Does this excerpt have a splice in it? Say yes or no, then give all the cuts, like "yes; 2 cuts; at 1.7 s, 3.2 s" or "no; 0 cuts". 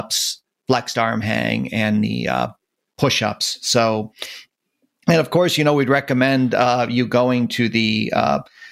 no; 0 cuts